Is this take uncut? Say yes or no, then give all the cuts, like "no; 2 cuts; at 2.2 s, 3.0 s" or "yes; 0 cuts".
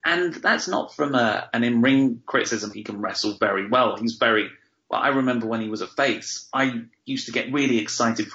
no; 1 cut; at 2.7 s